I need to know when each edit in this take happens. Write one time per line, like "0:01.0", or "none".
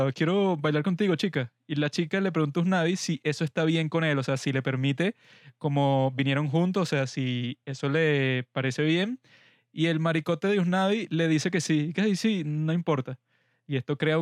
none